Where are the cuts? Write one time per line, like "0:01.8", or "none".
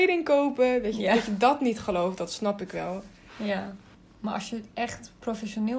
none